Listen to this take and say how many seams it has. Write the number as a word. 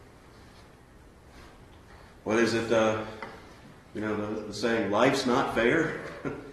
zero